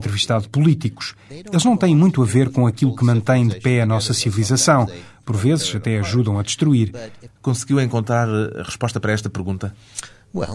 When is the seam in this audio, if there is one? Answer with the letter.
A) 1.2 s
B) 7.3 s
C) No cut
B